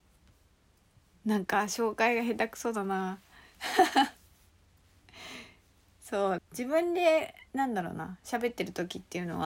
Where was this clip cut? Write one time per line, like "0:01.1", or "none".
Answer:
0:06.4
0:07.5